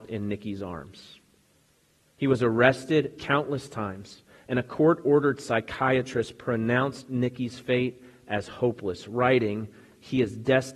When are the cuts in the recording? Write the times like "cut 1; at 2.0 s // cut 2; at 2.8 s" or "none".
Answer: none